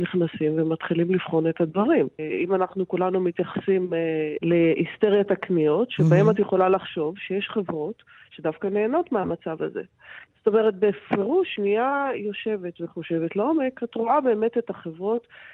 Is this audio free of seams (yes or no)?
no